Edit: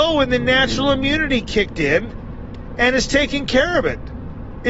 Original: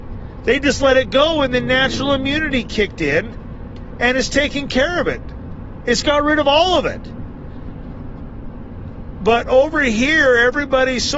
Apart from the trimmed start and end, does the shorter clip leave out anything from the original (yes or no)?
no